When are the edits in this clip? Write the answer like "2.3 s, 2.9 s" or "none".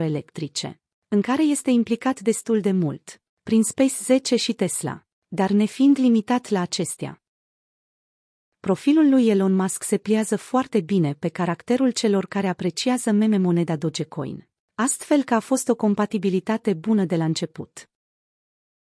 none